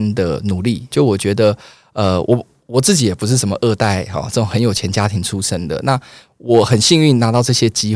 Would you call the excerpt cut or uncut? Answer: cut